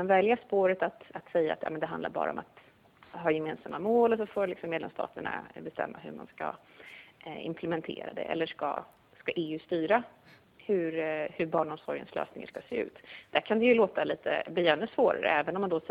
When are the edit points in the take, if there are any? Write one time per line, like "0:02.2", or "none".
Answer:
0:01.1